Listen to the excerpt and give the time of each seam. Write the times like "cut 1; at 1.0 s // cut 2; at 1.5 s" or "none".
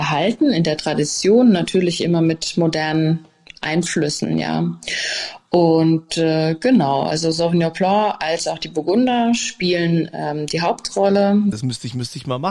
cut 1; at 11.5 s